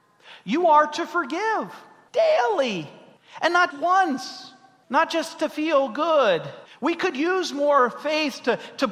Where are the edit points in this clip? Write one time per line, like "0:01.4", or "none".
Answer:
0:03.7
0:06.7